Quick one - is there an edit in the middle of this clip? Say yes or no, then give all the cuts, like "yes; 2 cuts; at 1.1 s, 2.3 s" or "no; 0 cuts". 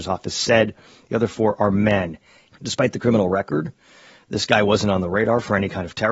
yes; 1 cut; at 2.5 s